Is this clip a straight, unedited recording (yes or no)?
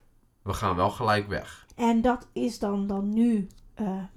no